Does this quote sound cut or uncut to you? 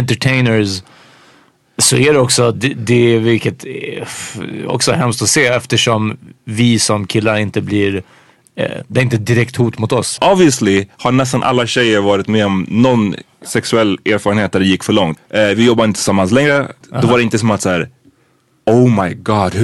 cut